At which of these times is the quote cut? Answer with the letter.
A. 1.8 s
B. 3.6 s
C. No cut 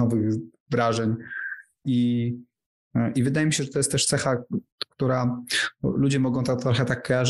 A